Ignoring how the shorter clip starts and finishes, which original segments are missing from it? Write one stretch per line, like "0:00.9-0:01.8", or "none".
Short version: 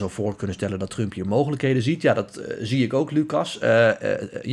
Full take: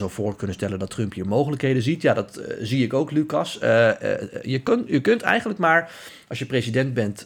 none